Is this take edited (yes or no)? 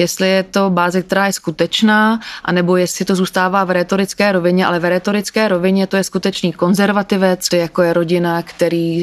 yes